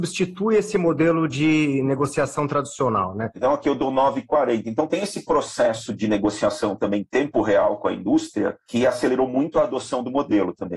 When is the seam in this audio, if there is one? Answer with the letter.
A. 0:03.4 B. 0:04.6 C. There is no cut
A